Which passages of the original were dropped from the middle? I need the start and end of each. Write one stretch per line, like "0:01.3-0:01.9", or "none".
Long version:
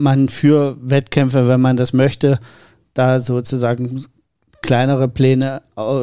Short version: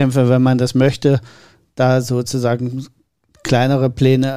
none